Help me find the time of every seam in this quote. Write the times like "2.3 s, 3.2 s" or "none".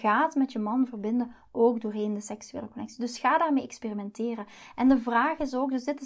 none